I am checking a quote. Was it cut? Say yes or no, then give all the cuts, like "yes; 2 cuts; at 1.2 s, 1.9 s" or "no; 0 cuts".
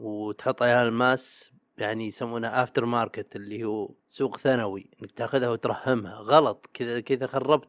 yes; 1 cut; at 4.0 s